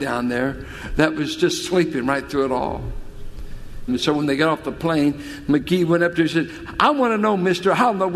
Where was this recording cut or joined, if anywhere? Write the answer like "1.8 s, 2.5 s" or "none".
3.9 s